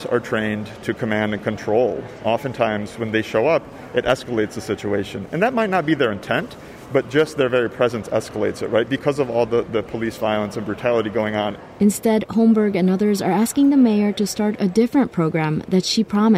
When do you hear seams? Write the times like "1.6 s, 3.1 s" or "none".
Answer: none